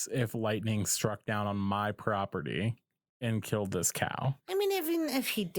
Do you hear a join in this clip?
yes; 1 cut; at 4.4 s

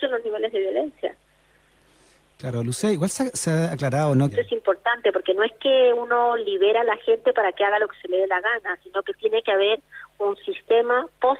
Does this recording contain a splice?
yes; 1 cut; at 4.3 s

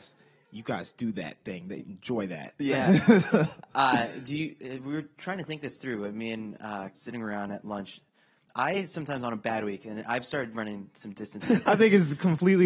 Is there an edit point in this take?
yes; 2 cuts; at 6.9 s, 11.4 s

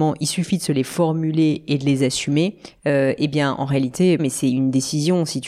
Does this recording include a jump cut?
yes; 2 cuts; at 2.8 s, 4.2 s

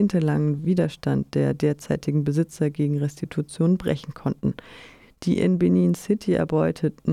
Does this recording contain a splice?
no; 0 cuts

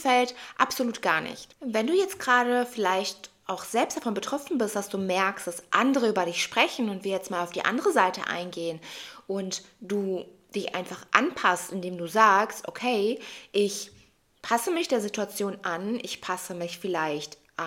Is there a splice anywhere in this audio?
no; 0 cuts

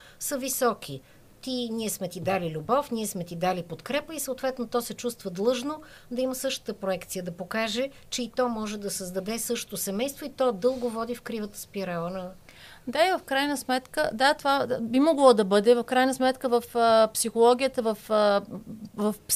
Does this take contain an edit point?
no; 0 cuts

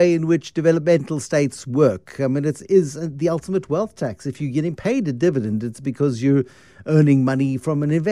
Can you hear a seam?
no; 0 cuts

